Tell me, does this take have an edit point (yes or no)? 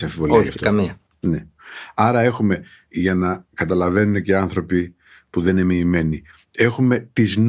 no